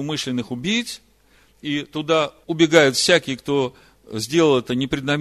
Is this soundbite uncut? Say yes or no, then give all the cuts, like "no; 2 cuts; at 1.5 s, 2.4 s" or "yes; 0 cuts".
yes; 0 cuts